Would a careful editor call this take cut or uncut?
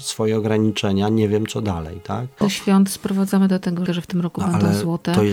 cut